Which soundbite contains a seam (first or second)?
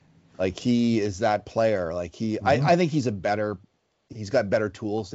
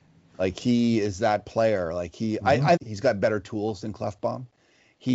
second